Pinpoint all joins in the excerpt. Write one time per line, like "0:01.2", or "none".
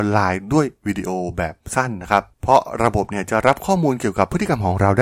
0:02.3